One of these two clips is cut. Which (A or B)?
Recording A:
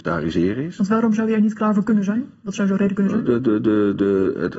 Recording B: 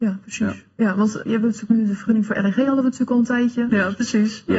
B